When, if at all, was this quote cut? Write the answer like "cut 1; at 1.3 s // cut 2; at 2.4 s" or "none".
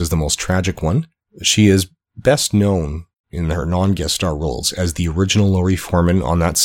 none